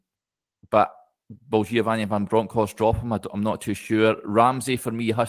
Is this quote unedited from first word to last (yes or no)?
yes